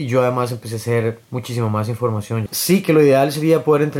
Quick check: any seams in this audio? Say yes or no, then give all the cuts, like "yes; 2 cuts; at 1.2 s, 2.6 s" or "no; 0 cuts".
yes; 2 cuts; at 1.2 s, 2.5 s